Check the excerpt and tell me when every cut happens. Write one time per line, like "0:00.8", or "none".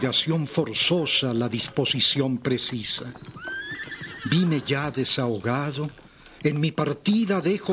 0:06.4